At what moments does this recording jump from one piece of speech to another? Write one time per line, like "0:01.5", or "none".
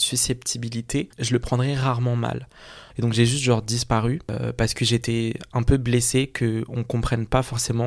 0:01.1
0:02.9